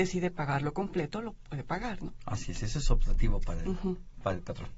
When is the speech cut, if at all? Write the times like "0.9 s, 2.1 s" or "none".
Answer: none